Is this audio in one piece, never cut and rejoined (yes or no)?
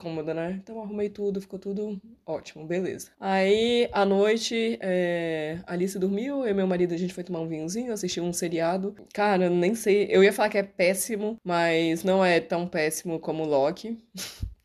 yes